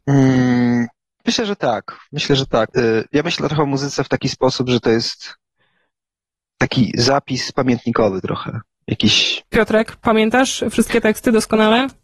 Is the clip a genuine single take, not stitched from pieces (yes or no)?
no